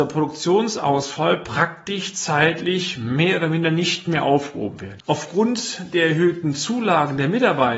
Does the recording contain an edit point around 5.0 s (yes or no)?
yes